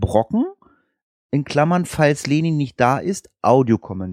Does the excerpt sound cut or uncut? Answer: uncut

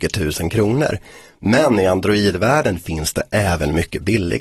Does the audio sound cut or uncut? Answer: uncut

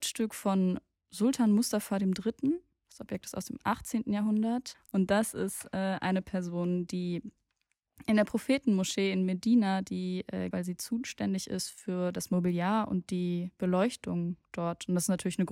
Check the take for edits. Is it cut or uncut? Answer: cut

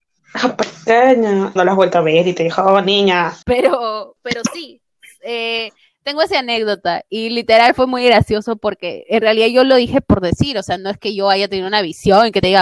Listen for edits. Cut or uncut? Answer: cut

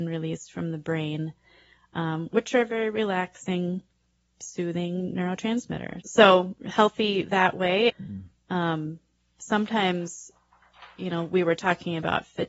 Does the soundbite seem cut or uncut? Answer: cut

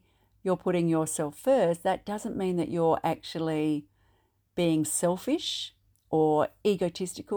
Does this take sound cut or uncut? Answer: uncut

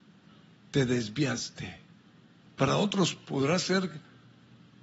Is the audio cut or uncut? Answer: cut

